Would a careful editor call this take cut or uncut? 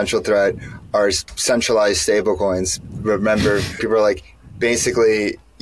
cut